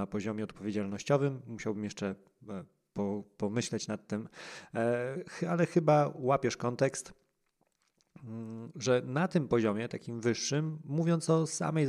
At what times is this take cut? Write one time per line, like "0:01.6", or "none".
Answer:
none